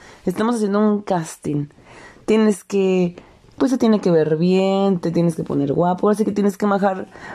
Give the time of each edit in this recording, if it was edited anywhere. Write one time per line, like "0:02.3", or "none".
none